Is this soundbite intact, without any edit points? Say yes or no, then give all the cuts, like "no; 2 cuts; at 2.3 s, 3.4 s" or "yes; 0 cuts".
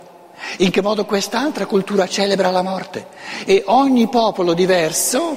no; 1 cut; at 3.4 s